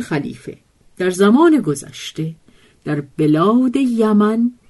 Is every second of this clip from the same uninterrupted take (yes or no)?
yes